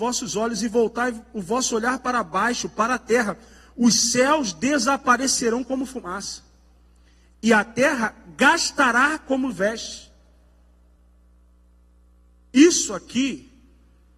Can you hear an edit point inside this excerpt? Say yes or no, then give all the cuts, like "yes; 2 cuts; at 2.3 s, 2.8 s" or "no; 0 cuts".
no; 0 cuts